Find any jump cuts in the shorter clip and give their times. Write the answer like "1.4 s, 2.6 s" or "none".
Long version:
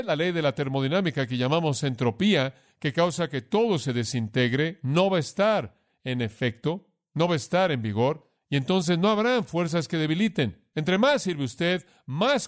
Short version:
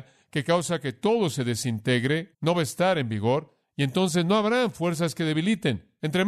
2.3 s